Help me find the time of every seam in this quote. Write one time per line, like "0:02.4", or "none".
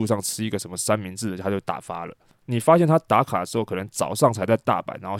0:02.4